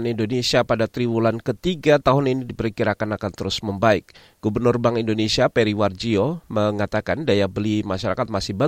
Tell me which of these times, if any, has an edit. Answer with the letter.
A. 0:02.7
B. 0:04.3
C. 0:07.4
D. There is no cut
D